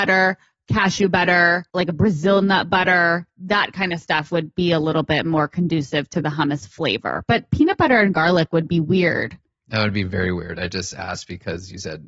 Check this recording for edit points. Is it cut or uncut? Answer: cut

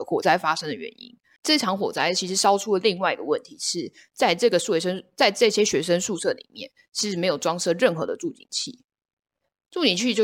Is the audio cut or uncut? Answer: uncut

